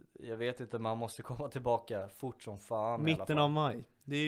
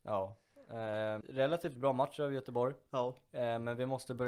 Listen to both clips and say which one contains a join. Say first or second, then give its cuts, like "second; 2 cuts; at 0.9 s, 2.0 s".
second; 1 cut; at 1.2 s